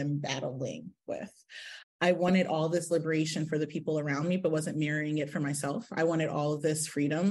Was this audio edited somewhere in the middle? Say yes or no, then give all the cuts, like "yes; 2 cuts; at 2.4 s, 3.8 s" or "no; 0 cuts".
yes; 1 cut; at 1.8 s